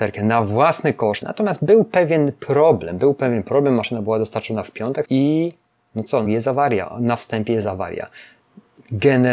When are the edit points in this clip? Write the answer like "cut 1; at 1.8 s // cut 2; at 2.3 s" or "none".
cut 1; at 1.2 s // cut 2; at 5.0 s // cut 3; at 6.2 s